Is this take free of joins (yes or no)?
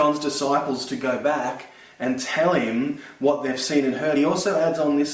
yes